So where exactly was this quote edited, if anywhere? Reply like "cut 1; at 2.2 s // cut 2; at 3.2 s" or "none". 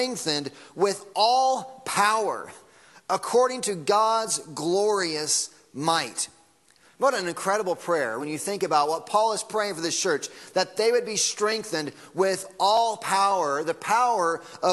cut 1; at 6.9 s // cut 2; at 8.2 s